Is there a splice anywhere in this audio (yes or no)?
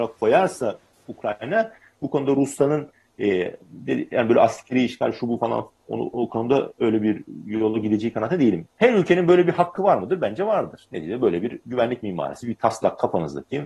yes